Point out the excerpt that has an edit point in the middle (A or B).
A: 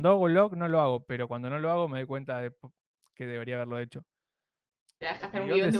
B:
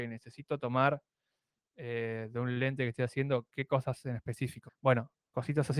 B